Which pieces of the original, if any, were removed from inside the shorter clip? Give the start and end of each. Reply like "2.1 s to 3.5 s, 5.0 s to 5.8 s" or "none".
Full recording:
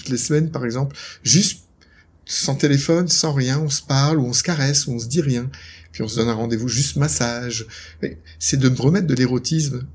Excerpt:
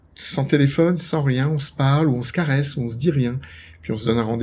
none

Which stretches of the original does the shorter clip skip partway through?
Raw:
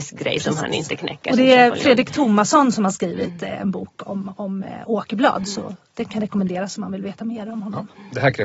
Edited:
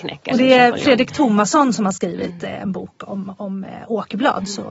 none

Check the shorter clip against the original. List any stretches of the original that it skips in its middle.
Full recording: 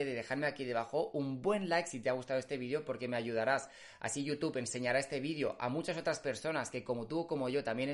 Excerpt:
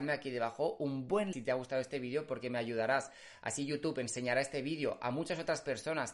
1.7 s to 1.9 s

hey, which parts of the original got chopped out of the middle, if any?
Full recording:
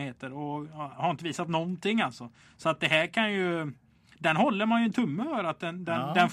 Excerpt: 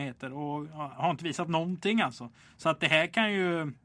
none

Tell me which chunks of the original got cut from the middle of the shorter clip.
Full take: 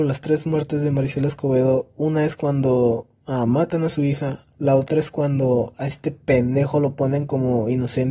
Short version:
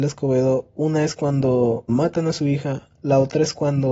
3.1 s to 3.5 s

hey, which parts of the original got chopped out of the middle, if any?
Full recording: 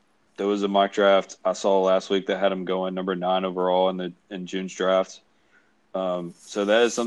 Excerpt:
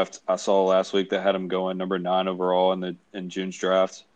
none

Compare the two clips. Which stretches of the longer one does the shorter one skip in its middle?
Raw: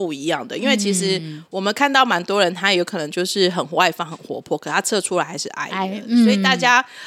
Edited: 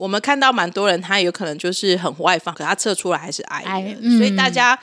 4.1 s to 4.6 s

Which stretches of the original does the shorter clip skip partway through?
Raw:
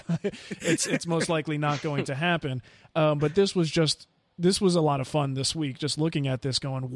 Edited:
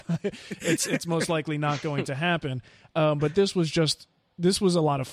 none

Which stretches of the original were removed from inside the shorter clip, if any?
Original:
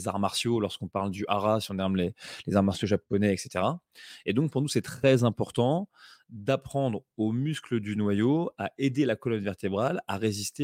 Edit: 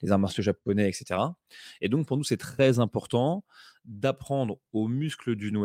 none

